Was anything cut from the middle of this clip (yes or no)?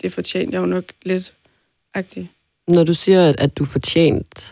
yes